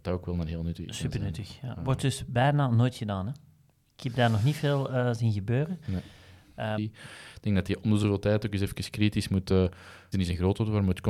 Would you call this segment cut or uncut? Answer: cut